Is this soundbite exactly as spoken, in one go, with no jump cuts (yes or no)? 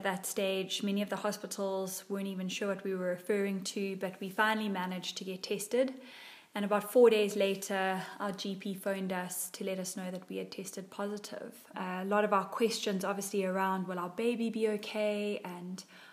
no